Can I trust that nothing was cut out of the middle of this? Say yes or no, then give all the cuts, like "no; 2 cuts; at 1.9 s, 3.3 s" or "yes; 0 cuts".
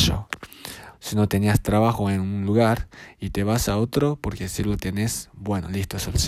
no; 1 cut; at 0.9 s